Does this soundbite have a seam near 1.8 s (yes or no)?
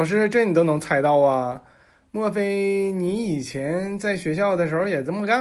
no